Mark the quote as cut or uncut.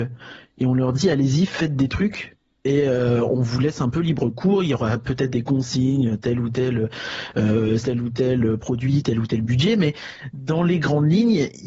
cut